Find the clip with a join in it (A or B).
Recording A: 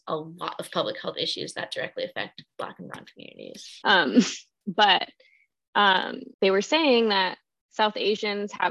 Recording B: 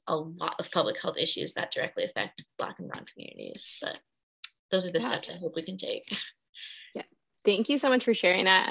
A